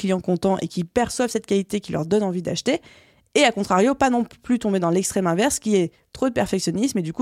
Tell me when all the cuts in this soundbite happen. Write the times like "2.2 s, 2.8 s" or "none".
none